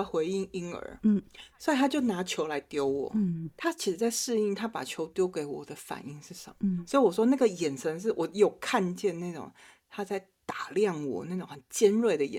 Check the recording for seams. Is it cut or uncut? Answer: uncut